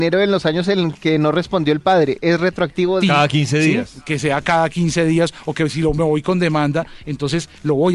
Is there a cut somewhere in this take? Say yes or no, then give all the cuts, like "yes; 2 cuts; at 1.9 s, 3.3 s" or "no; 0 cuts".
yes; 1 cut; at 3.0 s